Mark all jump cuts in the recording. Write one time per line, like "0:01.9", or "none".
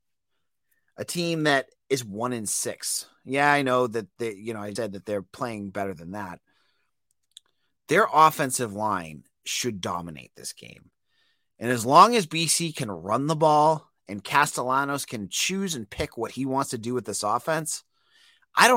0:04.8